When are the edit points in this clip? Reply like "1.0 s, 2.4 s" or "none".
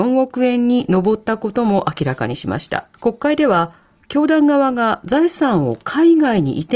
2.9 s